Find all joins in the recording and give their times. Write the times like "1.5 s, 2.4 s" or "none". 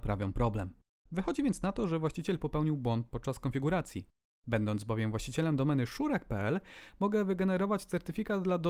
1.1 s